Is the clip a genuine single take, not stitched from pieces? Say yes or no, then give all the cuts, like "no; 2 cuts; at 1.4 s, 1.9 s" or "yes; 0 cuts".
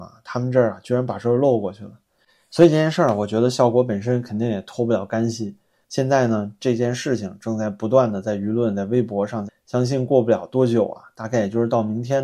no; 2 cuts; at 5.8 s, 9.5 s